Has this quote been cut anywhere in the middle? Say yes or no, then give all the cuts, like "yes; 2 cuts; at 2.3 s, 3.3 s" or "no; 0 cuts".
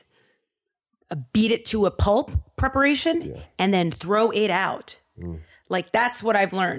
no; 0 cuts